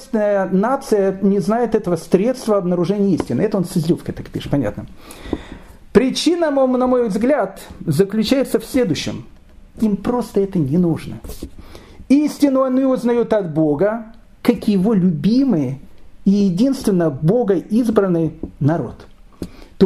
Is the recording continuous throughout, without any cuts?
yes; 0 cuts

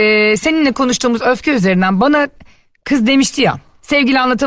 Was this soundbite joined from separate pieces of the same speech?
no; 0 cuts

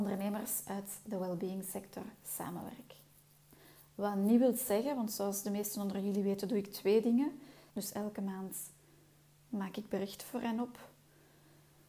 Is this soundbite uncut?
no; 1 cut; at 7.7 s

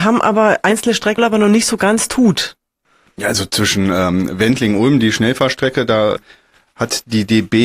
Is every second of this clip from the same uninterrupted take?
no; 1 cut; at 1.2 s

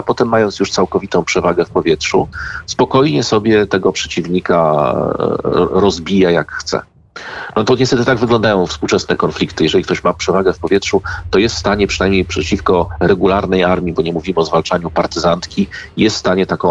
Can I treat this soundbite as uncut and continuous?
yes; 0 cuts

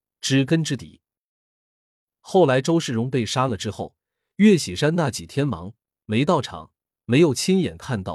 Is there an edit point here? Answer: no; 0 cuts

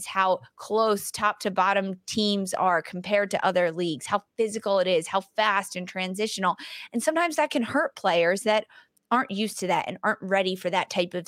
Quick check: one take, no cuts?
yes; 0 cuts

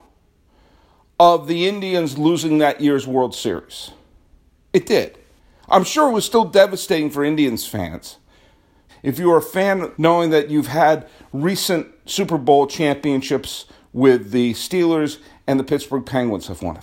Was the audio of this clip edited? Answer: yes; 2 cuts; at 8.9 s, 9.9 s

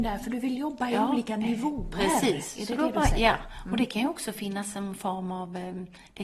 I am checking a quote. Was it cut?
no; 0 cuts

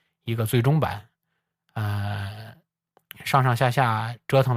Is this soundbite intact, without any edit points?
yes; 0 cuts

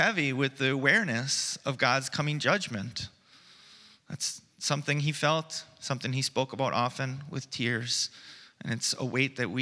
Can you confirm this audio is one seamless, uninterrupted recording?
yes; 0 cuts

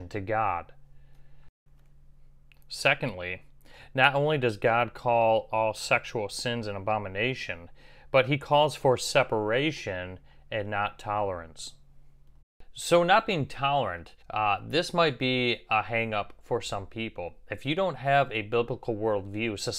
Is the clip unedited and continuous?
no; 1 cut; at 14.2 s

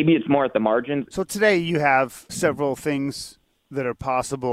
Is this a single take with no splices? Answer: no; 2 cuts; at 1.1 s, 2.3 s

